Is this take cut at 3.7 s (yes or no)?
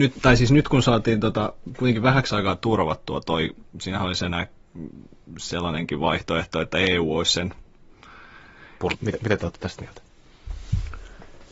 no